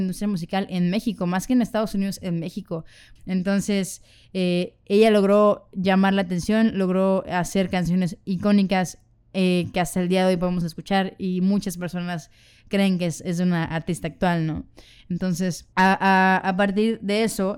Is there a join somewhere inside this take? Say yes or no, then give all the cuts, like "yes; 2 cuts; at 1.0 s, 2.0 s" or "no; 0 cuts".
yes; 2 cuts; at 3.2 s, 15.7 s